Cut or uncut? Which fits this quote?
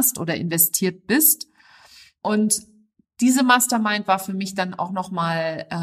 uncut